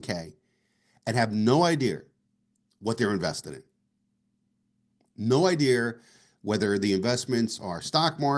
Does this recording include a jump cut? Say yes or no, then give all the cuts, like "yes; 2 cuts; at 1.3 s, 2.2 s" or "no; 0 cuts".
no; 0 cuts